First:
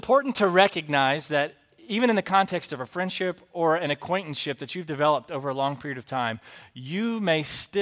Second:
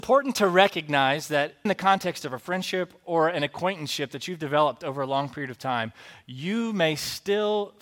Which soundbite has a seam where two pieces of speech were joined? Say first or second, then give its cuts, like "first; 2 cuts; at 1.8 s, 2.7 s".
second; 1 cut; at 1.7 s